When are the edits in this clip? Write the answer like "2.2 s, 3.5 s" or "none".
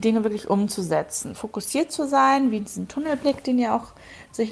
none